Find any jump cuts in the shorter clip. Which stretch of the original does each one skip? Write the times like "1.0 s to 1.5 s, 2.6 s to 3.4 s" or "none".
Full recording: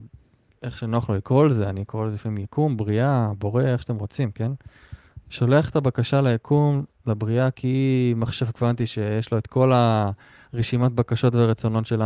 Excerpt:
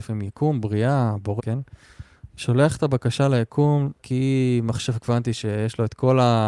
3.5 s to 4.3 s, 6.9 s to 7.5 s